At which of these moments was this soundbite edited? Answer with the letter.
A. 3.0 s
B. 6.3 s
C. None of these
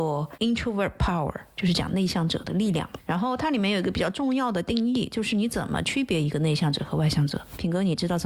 C